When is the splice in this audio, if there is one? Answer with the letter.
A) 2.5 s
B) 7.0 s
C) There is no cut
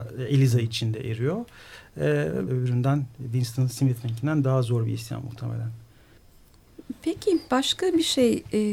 A